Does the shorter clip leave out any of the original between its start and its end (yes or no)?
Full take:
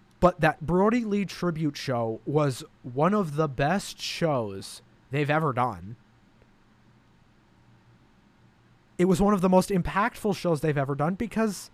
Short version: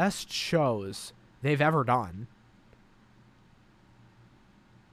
no